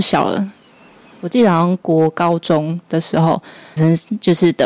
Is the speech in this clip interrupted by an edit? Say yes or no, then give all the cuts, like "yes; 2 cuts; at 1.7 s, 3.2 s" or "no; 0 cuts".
yes; 1 cut; at 3.8 s